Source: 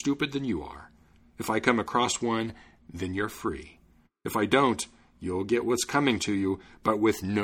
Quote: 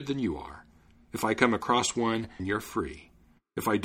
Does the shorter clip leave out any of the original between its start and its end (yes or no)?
yes